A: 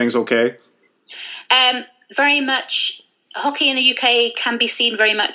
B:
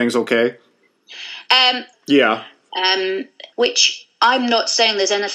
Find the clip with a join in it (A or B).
B